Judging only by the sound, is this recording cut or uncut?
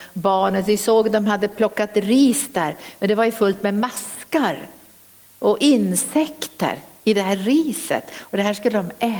uncut